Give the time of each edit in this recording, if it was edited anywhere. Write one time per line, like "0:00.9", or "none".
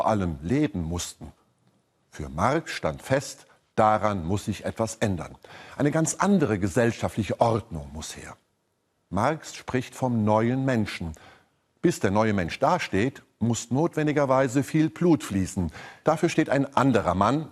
0:16.0